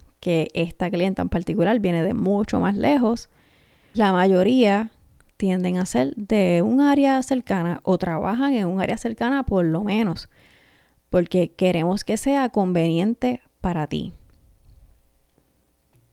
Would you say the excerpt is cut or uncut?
cut